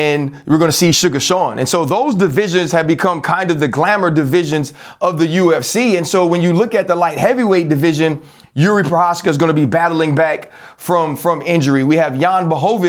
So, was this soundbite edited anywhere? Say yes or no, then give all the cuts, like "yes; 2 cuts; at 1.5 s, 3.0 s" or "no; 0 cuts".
no; 0 cuts